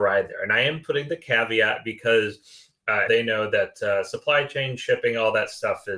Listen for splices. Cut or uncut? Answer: cut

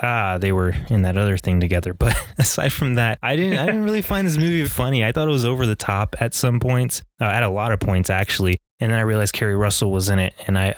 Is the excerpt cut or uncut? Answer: cut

